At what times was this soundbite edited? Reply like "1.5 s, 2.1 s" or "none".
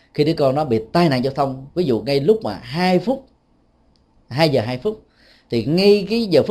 none